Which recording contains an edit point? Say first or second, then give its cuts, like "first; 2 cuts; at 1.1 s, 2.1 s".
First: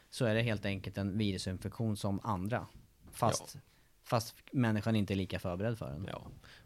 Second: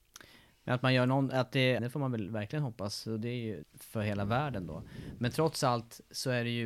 second; 2 cuts; at 1.8 s, 3.6 s